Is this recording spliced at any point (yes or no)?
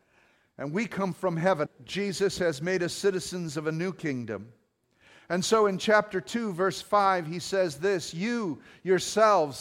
yes